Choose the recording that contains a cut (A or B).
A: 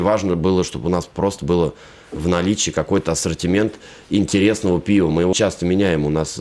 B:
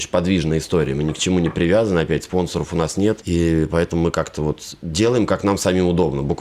A